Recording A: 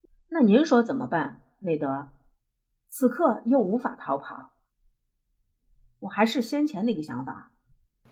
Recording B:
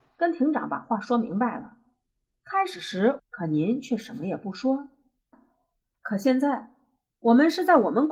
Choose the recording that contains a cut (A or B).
B